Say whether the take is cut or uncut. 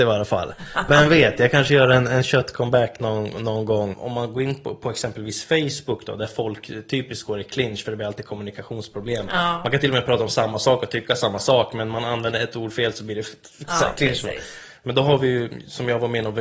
cut